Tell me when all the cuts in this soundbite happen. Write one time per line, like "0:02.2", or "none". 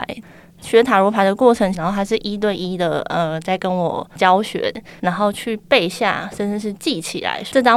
0:01.7
0:05.0

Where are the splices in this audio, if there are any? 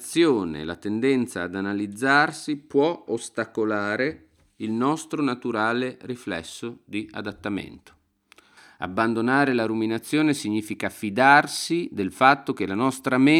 none

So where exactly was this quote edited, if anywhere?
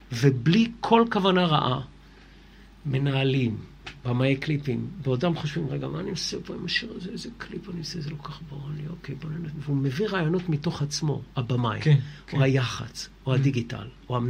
0:04.0

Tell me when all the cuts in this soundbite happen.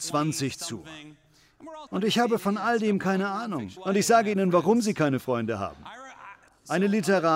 0:01.9
0:03.8

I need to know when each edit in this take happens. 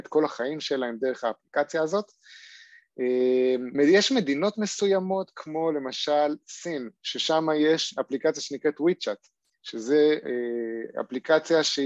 0:03.7

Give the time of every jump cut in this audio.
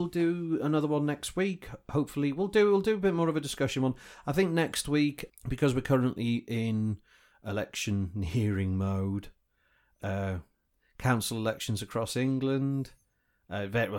0:05.3

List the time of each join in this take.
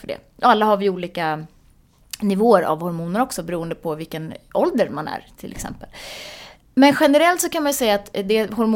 none

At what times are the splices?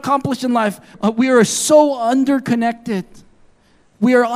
0:00.9

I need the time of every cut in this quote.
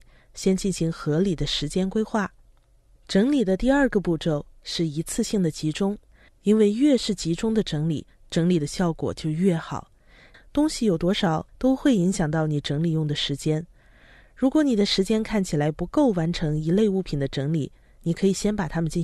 0:06.3
0:10.3
0:11.5

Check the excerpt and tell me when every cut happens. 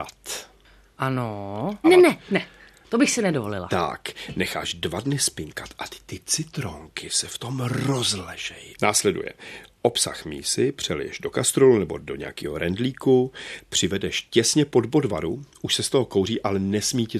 0:01.8

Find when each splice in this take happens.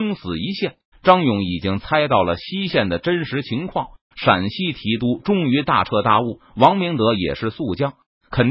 0:00.9
0:04.1

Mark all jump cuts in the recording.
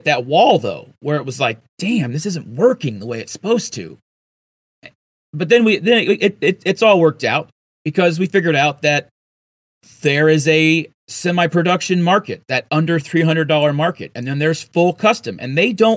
0:11.0

